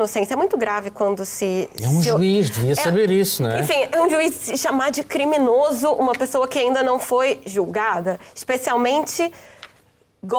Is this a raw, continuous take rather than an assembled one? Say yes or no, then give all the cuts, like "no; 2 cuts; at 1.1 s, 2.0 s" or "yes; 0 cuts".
yes; 0 cuts